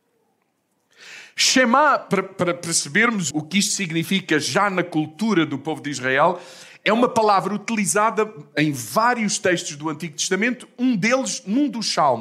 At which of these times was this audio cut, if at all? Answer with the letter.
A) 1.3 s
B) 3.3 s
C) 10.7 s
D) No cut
B